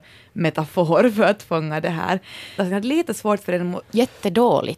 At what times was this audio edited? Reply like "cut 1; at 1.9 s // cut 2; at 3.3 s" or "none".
cut 1; at 2.6 s // cut 2; at 3.8 s